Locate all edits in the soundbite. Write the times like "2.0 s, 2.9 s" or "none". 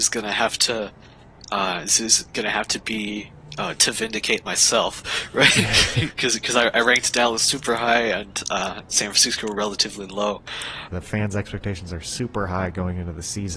10.9 s

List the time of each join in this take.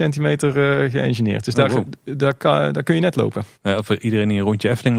3.5 s

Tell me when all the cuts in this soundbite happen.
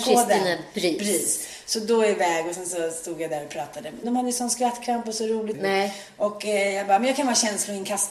4.0 s, 5.5 s

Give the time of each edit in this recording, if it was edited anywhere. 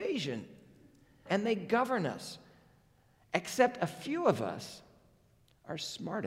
1.3 s

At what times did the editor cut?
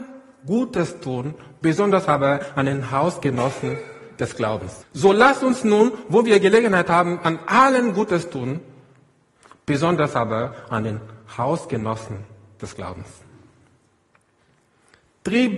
4.8 s

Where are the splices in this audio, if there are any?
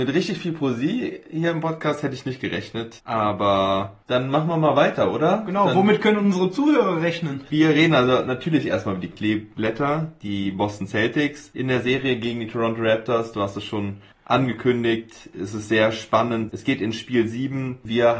7.5 s

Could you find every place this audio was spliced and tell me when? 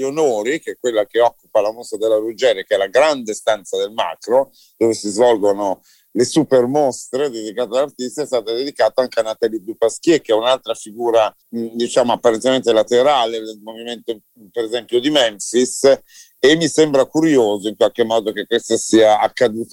11.4 s

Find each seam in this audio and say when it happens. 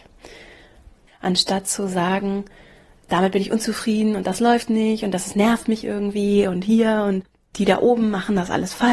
1.1 s

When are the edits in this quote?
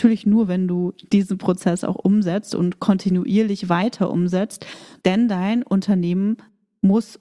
5.0 s

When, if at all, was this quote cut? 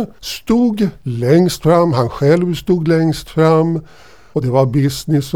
none

